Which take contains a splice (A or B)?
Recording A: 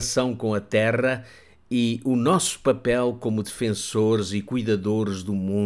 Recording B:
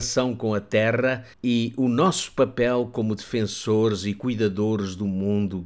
B